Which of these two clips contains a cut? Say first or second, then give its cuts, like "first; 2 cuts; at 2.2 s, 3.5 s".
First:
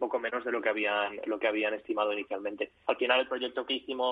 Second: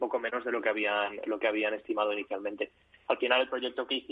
first; 1 cut; at 2.8 s